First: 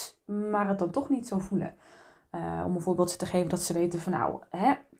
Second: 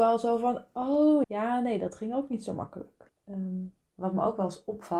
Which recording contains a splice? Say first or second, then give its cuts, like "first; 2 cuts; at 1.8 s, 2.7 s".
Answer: second; 2 cuts; at 1.2 s, 3.1 s